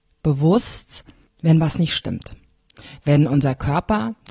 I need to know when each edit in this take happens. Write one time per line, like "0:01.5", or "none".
none